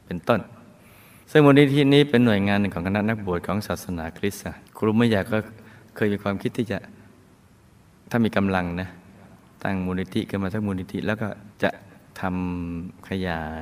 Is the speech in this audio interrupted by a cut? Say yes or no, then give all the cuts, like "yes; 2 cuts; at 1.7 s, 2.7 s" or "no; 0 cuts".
yes; 2 cuts; at 4.7 s, 11.5 s